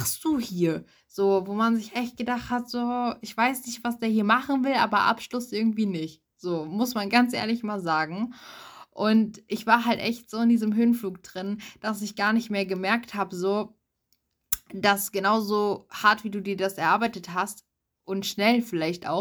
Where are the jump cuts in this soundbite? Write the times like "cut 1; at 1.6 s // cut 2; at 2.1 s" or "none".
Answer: none